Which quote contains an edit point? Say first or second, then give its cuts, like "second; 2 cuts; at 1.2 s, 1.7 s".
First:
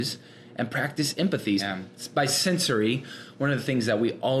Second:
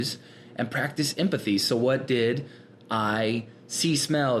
first; 1 cut; at 1.6 s